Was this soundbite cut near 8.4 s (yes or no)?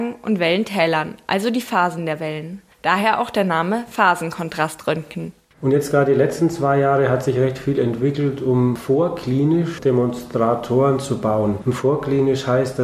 no